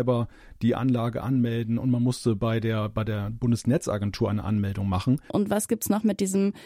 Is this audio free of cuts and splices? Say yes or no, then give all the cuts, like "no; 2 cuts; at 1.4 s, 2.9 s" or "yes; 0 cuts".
no; 1 cut; at 5.3 s